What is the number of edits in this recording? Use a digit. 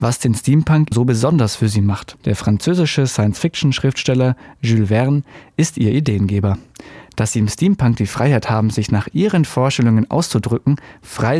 2